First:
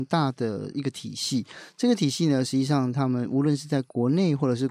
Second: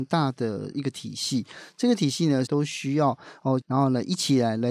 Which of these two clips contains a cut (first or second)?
second